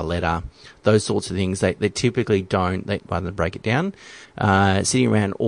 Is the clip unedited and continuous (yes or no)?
no